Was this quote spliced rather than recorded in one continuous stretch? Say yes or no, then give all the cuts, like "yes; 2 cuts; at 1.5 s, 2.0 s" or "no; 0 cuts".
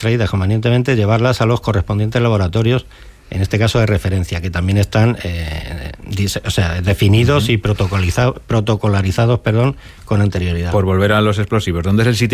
no; 0 cuts